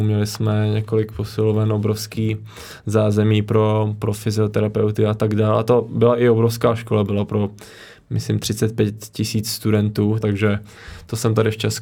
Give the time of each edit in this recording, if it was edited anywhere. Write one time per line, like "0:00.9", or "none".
0:10.2